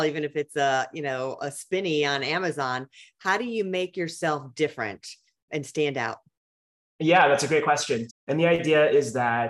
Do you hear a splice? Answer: yes; 1 cut; at 8.1 s

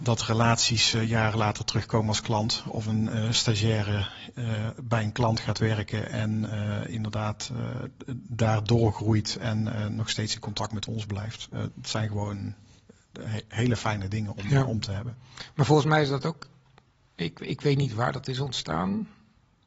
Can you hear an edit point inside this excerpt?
no; 0 cuts

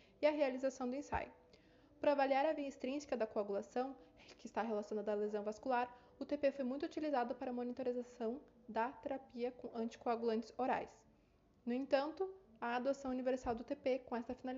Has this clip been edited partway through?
no; 0 cuts

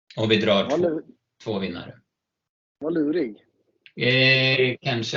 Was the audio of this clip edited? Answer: yes; 1 cut; at 3.9 s

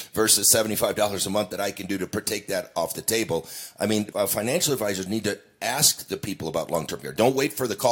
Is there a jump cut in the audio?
yes; 1 cut; at 4.1 s

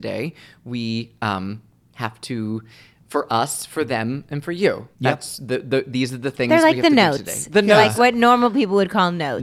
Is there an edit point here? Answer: yes; 1 cut; at 4.9 s

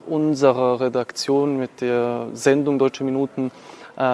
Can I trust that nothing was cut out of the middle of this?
yes; 0 cuts

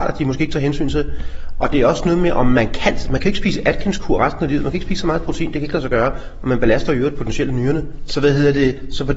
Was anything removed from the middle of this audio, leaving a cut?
yes; 1 cut; at 8.1 s

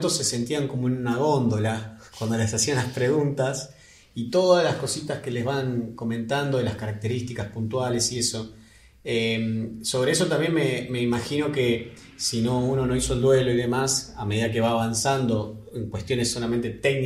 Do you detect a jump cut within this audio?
no; 0 cuts

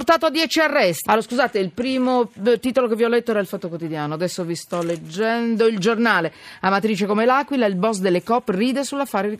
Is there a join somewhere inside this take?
yes; 1 cut; at 1.1 s

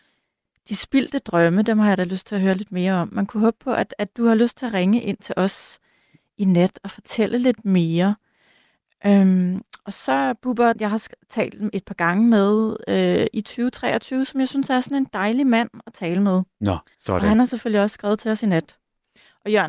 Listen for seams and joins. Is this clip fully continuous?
no; 2 cuts; at 10.7 s, 16.9 s

